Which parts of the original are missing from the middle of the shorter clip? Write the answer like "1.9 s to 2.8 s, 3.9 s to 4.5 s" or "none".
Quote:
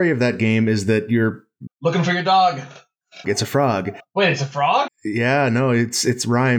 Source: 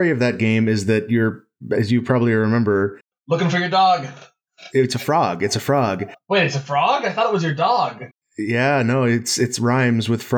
1.7 s to 3.1 s, 4.7 s to 5.4 s, 7.0 s to 8.2 s